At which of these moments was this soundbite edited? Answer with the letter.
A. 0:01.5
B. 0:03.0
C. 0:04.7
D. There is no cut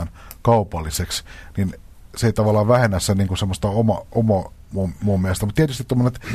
C